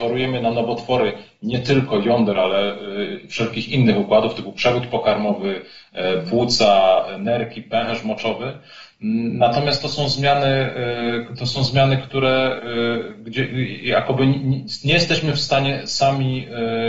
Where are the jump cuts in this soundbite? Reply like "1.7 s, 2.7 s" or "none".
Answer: none